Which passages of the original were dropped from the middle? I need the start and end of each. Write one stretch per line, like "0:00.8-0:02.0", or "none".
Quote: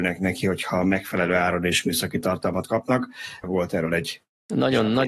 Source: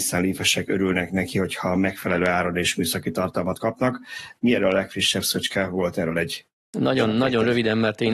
0:04.4-0:05.7